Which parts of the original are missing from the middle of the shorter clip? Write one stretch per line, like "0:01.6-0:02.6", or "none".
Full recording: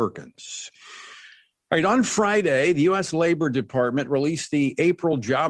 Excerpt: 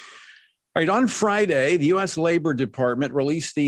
none

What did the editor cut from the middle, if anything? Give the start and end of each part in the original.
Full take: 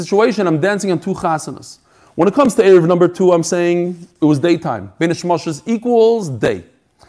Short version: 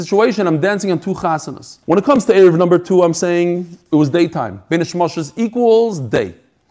0:01.8-0:02.1

